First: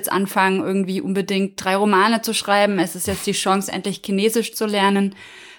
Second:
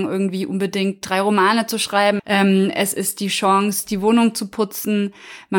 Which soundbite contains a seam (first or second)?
second